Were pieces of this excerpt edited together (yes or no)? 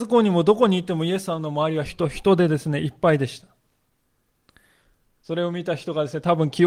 yes